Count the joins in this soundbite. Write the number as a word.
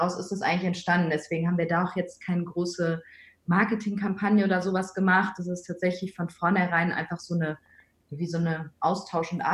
zero